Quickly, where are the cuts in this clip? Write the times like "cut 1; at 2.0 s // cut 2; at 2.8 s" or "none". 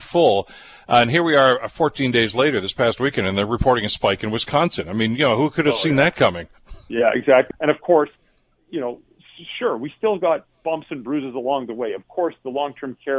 cut 1; at 7.5 s